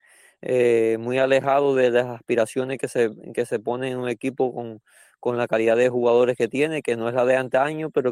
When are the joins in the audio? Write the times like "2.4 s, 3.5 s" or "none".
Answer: none